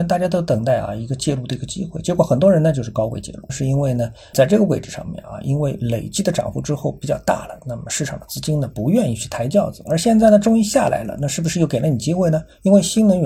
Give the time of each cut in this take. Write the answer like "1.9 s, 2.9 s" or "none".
3.5 s